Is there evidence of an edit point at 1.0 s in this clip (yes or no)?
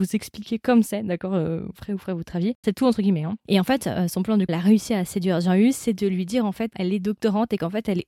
no